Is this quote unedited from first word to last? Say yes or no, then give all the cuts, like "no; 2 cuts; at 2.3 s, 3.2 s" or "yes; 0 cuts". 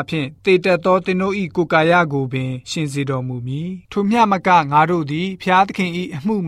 no; 1 cut; at 3.8 s